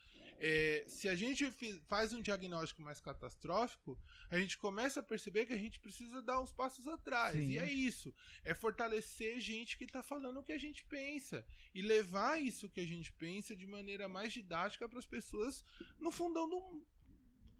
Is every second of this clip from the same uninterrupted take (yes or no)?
yes